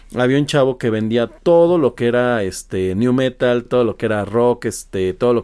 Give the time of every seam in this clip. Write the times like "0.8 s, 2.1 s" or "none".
none

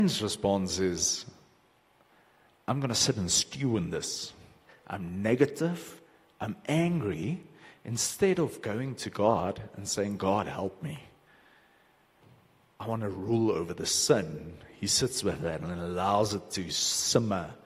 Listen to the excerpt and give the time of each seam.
4.7 s

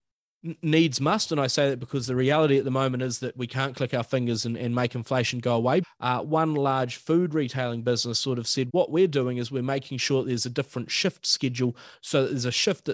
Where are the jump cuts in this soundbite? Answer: 5.8 s, 8.7 s

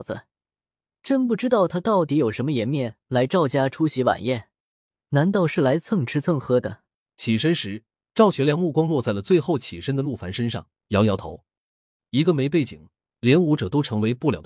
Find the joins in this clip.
7.0 s, 12.0 s

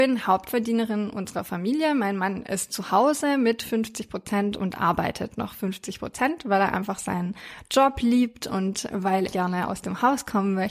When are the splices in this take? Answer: 9.3 s

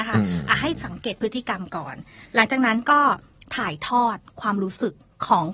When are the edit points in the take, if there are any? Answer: none

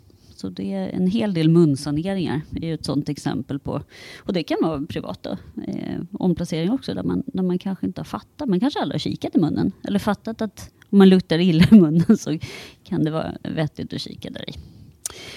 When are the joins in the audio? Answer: none

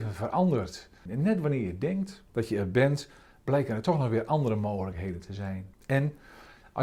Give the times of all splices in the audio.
1.1 s, 2.3 s, 5.7 s

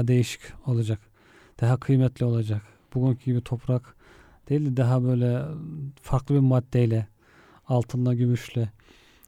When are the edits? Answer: none

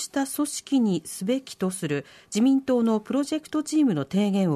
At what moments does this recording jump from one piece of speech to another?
none

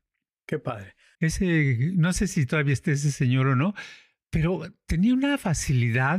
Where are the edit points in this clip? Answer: 1.1 s

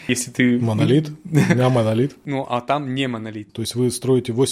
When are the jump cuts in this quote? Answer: 3.5 s

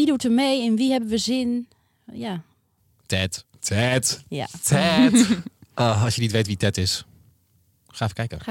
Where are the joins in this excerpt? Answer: none

